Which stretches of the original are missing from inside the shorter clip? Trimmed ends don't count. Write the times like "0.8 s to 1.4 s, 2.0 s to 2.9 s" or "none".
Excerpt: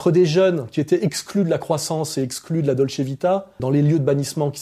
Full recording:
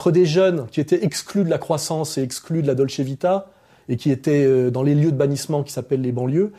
3.6 s to 4.7 s